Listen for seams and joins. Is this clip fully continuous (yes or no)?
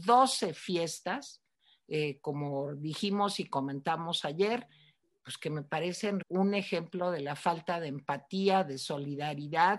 no